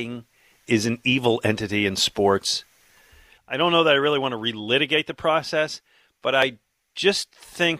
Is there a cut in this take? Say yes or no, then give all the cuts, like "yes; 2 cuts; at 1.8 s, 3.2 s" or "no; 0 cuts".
yes; 1 cut; at 3.4 s